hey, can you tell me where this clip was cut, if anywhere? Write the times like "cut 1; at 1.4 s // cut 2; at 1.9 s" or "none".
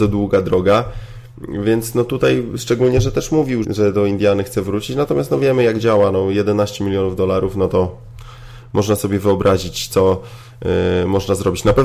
cut 1; at 3.6 s